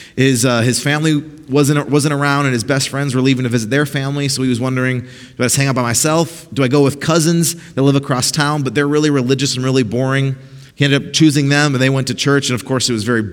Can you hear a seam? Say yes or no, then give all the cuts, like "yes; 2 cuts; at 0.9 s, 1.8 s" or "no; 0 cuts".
yes; 1 cut; at 10.7 s